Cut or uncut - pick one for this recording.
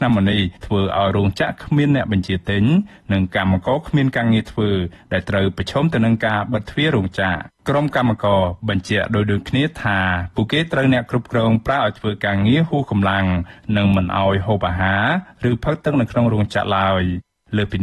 cut